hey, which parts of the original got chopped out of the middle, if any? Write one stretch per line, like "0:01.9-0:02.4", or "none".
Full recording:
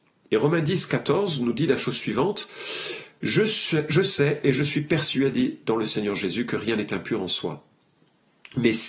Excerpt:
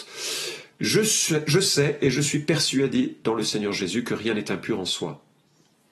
none

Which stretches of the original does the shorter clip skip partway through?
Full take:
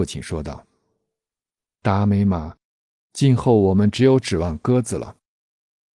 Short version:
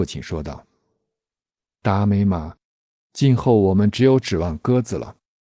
none

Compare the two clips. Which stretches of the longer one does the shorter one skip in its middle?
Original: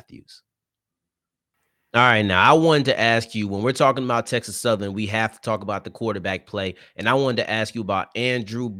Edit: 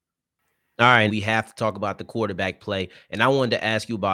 0:02.2-0:04.9

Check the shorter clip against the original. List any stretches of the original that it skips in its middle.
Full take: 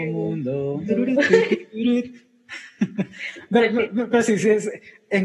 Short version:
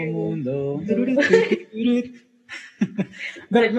none

